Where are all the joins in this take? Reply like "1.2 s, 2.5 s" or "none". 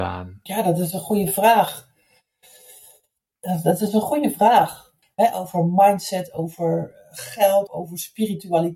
5.0 s, 7.7 s